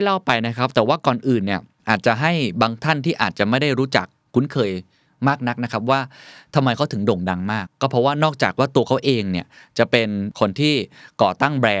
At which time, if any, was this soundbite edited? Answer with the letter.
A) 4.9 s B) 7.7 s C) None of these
B